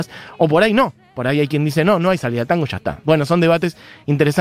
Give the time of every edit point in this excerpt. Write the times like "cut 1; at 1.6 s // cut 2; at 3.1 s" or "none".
cut 1; at 3.0 s